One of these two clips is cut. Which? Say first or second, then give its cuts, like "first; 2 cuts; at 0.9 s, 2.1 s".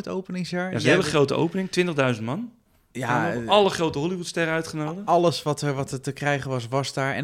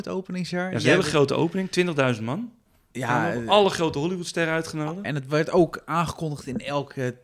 second; 1 cut; at 5.0 s